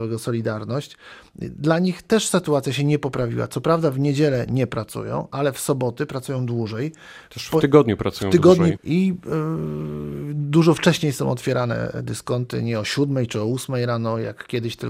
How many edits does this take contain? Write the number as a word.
one